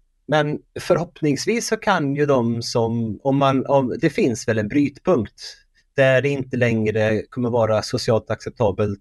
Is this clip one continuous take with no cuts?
yes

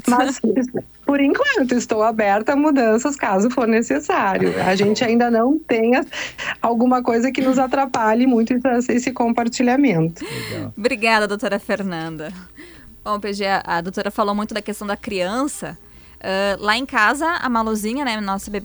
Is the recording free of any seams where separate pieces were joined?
yes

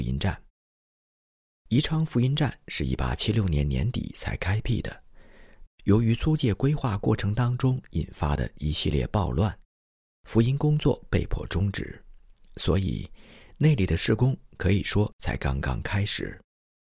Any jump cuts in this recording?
yes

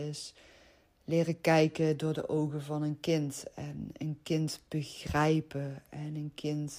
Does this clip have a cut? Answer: no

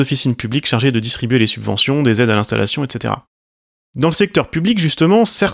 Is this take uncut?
yes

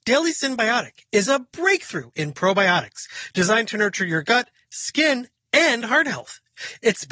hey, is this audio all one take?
yes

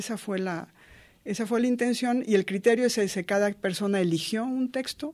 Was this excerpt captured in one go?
yes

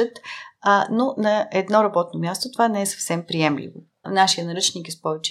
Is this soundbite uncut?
no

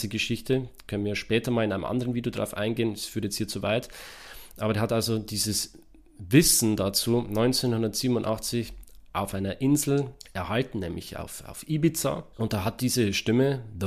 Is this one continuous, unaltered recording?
yes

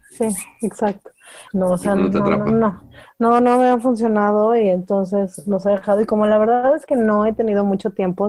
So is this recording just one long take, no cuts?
no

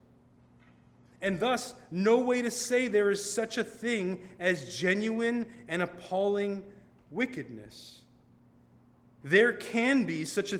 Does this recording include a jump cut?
yes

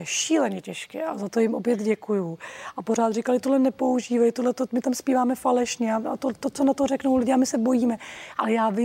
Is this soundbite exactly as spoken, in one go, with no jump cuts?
yes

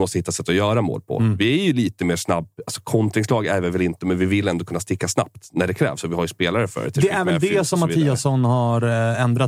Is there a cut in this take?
no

